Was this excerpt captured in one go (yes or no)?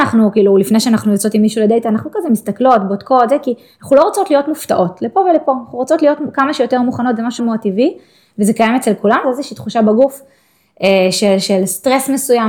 no